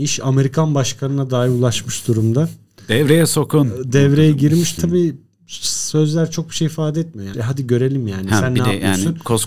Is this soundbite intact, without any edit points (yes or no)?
no